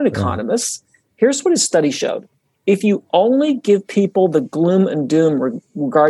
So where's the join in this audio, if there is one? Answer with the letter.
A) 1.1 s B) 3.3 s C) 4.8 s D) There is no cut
A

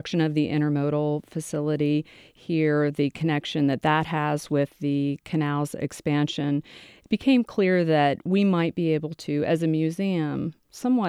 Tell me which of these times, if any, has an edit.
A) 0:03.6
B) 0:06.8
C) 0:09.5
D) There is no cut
D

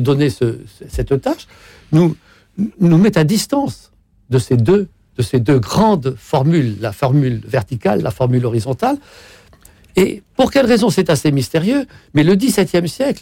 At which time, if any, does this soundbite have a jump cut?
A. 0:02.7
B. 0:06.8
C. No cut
A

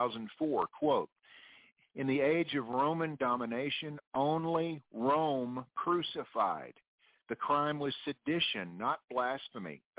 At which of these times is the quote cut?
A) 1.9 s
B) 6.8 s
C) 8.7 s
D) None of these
D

